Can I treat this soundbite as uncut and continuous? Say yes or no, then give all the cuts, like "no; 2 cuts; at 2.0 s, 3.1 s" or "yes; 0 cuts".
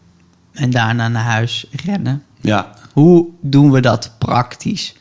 yes; 0 cuts